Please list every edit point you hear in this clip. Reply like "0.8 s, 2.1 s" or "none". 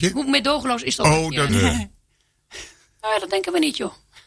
1.5 s